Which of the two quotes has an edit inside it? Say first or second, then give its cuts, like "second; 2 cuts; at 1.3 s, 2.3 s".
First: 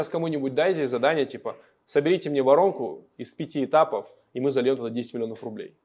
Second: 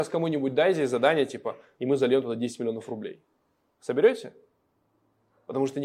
second; 1 cut; at 1.8 s